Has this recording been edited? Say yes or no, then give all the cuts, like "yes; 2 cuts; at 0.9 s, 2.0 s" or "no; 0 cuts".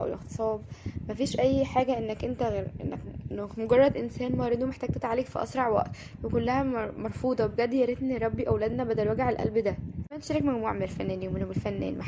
no; 0 cuts